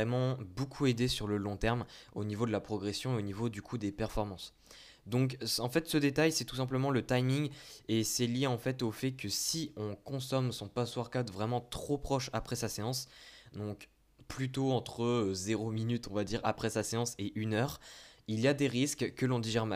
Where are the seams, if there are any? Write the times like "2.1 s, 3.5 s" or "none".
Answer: none